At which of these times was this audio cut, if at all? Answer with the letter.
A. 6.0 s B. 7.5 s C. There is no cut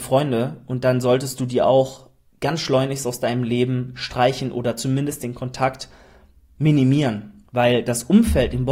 B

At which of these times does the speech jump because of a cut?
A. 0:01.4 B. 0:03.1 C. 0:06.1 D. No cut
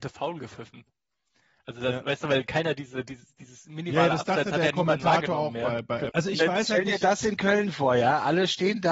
C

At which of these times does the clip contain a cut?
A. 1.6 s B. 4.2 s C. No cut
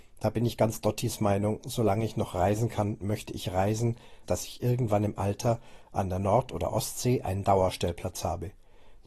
B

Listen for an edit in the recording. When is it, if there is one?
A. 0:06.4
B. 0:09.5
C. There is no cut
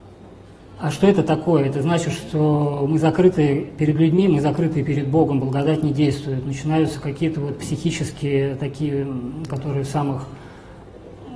B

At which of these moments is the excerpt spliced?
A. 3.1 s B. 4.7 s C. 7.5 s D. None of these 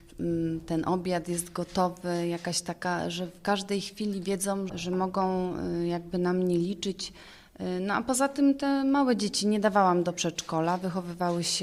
B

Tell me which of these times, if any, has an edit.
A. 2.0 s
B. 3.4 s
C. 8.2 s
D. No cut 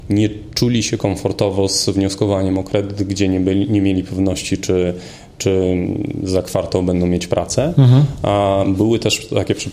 D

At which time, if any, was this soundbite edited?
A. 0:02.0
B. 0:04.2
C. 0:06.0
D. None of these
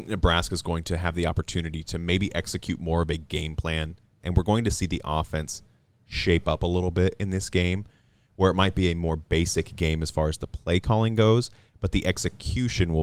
B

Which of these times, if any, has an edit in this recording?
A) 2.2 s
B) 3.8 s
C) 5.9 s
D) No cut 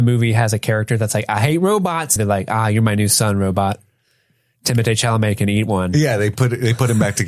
A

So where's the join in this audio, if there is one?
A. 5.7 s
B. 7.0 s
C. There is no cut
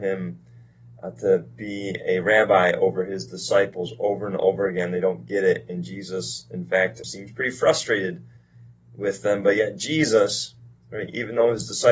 B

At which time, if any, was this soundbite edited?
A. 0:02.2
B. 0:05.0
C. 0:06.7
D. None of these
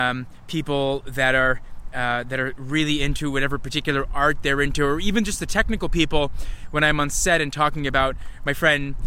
D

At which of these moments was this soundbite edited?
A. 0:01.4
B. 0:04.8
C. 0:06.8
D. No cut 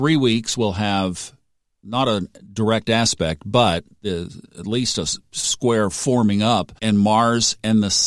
C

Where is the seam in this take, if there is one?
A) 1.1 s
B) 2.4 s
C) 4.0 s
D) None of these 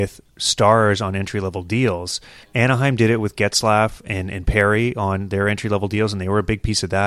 B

